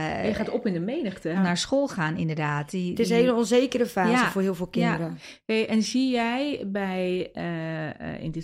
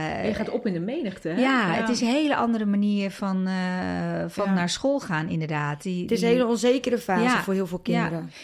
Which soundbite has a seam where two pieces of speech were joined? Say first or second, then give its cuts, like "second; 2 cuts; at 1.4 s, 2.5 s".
first; 1 cut; at 1.3 s